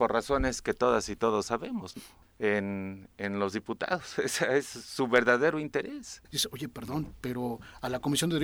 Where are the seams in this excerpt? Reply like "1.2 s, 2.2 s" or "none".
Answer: 2.2 s, 6.2 s